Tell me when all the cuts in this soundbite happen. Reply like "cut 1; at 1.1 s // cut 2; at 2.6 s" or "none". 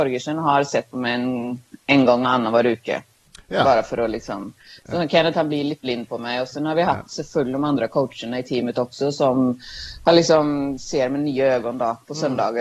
none

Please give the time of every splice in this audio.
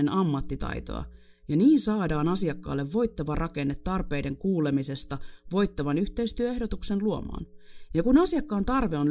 cut 1; at 7.9 s

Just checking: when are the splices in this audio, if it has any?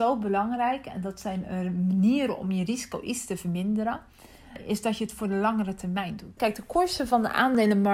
cut 1; at 6.4 s

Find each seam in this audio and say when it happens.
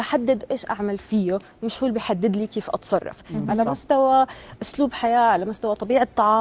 cut 1; at 3.5 s

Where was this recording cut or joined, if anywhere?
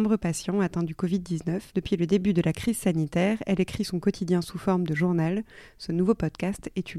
cut 1; at 1.7 s

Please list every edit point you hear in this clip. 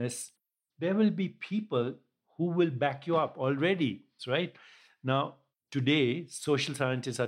cut 1; at 4.2 s

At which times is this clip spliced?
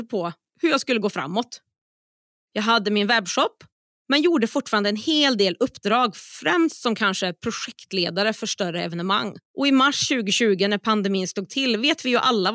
cut 1; at 2.4 s // cut 2; at 9.5 s

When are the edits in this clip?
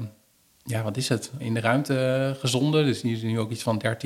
cut 1; at 1.4 s

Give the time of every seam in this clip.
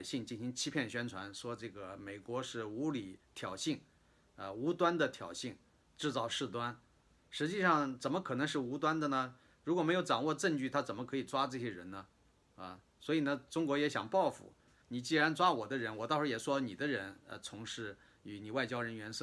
cut 1; at 14.8 s

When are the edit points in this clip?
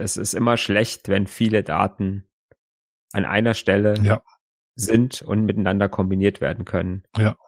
none

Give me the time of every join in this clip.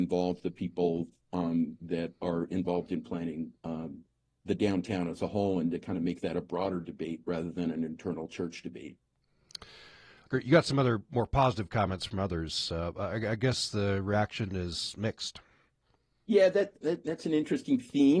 cut 1; at 10.3 s // cut 2; at 16.8 s

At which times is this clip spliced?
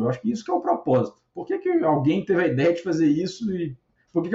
none

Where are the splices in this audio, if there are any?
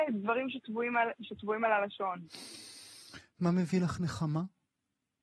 none

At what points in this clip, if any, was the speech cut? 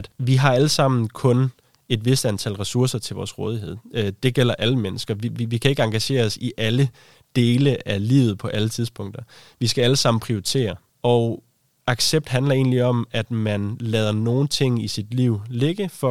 none

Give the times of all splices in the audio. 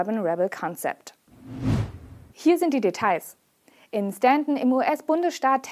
cut 1; at 2.3 s

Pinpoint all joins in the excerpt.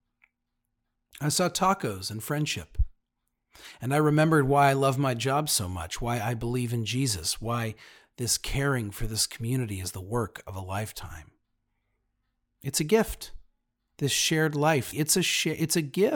cut 1; at 13.9 s // cut 2; at 14.9 s

